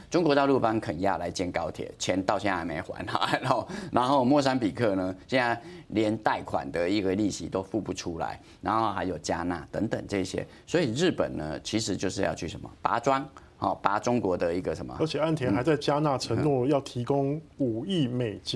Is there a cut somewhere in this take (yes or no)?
no